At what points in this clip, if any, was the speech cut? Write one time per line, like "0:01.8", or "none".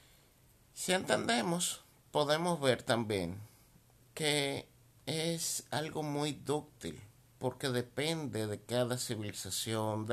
none